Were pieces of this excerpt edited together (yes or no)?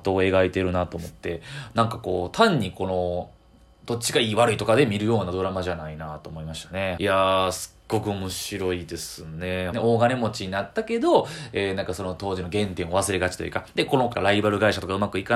yes